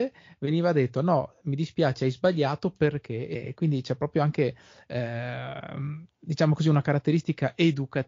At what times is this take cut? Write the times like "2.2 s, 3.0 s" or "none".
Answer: none